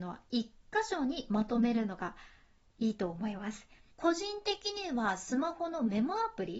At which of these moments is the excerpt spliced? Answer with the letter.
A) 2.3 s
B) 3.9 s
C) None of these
B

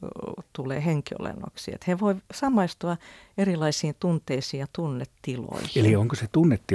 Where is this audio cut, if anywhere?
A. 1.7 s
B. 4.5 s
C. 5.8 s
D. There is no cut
D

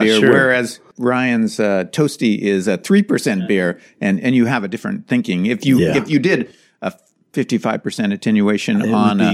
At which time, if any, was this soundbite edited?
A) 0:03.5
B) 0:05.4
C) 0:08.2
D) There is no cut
D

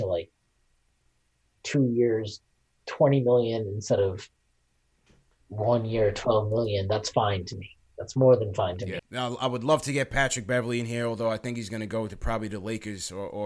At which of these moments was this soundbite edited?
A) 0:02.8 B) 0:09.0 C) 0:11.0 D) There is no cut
B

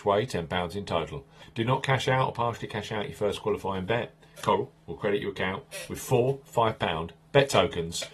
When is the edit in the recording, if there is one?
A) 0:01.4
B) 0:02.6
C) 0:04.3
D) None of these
A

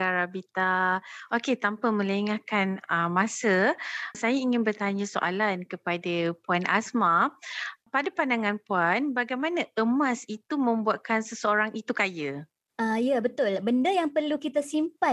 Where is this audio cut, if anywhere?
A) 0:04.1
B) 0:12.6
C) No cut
A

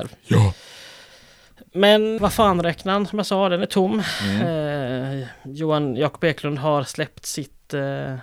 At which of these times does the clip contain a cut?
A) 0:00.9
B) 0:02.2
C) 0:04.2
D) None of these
B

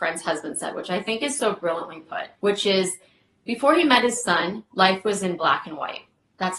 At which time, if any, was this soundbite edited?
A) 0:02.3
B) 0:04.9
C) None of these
A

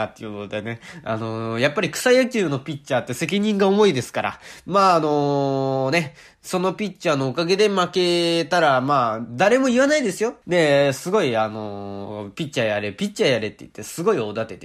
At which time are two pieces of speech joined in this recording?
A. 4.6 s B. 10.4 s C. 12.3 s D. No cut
B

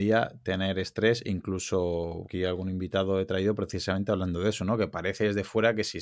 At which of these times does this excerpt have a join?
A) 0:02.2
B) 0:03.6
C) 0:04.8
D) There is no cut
A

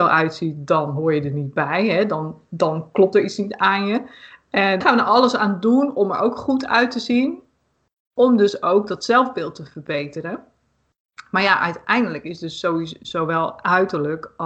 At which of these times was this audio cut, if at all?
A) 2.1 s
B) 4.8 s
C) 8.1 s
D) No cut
B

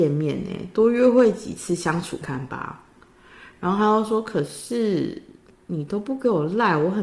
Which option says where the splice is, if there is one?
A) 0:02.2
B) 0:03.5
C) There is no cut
A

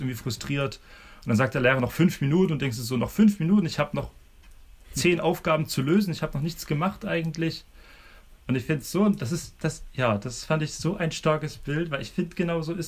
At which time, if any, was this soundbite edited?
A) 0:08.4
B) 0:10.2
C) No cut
A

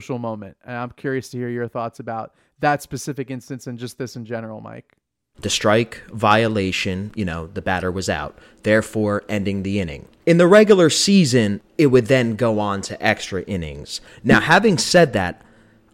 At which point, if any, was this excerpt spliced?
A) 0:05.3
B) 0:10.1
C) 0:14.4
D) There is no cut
A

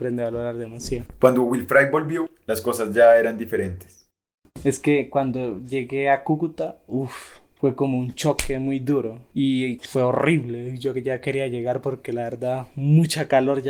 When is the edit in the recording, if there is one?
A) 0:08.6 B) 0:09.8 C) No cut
B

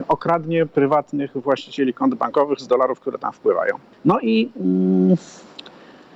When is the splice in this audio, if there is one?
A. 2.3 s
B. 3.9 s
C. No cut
B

